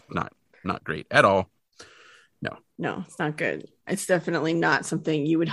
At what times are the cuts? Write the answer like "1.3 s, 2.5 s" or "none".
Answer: 3.9 s